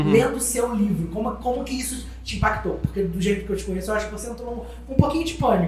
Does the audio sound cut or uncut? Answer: uncut